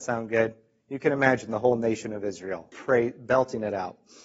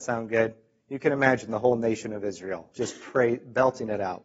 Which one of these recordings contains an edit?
first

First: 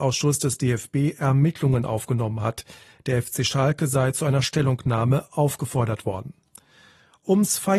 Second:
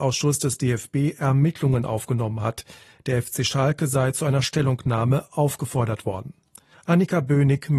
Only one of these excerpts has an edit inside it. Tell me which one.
second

